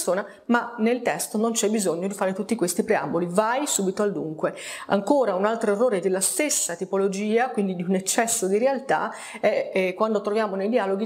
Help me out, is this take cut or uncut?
uncut